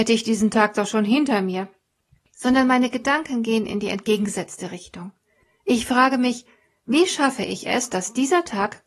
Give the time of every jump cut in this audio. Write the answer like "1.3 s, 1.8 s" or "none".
none